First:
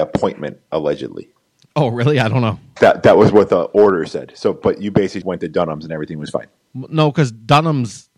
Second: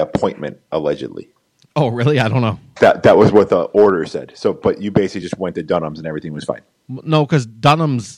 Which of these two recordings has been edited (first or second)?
first